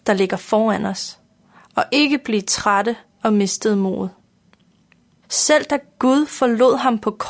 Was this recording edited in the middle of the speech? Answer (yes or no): yes